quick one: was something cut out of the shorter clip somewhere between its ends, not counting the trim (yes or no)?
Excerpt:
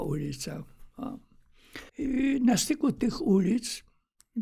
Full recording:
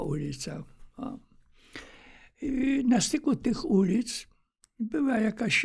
yes